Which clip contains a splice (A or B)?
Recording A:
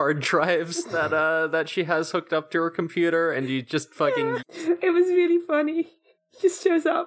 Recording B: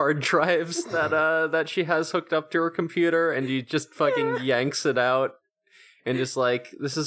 A